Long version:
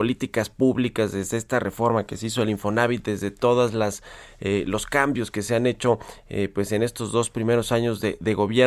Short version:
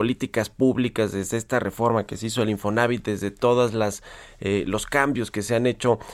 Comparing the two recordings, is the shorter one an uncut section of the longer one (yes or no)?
yes